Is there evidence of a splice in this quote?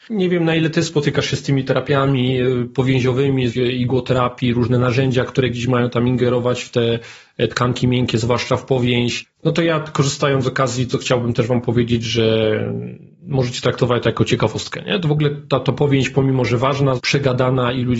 yes; 2 cuts; at 3.5 s, 17.0 s

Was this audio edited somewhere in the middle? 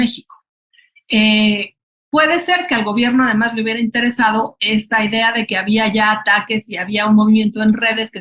no; 0 cuts

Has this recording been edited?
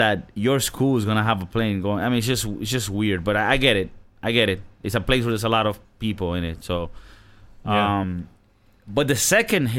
no; 0 cuts

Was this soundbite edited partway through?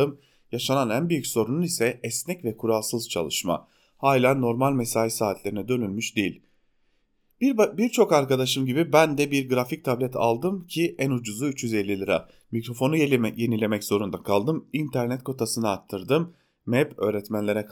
no; 0 cuts

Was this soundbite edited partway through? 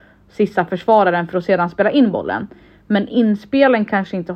no; 0 cuts

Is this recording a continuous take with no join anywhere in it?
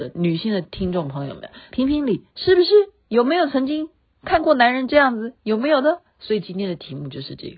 no; 2 cuts; at 1.7 s, 6.1 s

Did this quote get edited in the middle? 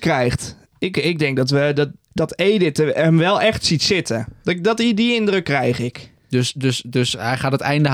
no; 0 cuts

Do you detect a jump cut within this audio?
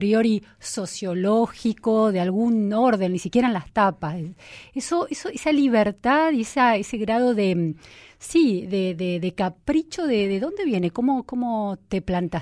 no; 0 cuts

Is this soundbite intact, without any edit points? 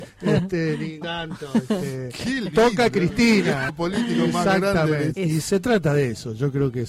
no; 3 cuts; at 1.0 s, 3.7 s, 5.1 s

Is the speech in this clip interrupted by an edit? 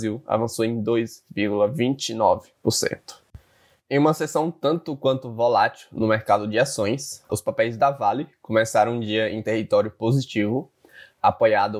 yes; 1 cut; at 7.3 s

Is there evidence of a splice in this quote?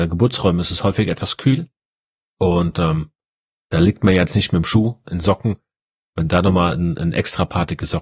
yes; 1 cut; at 5.0 s

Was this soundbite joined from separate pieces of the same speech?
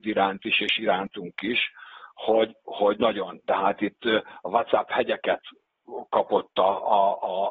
no; 0 cuts

